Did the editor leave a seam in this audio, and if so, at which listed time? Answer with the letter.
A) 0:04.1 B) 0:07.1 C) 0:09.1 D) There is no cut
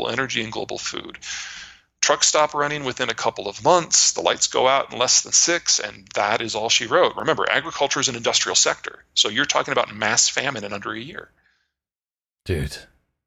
D